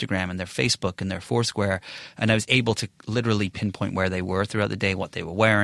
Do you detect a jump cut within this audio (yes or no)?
no